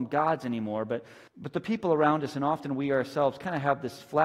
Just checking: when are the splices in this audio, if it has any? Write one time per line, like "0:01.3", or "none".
0:01.3